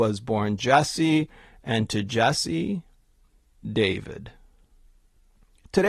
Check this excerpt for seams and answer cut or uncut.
uncut